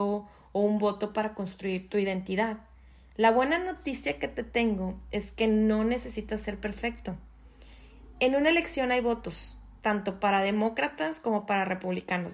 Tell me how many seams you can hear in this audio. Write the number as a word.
one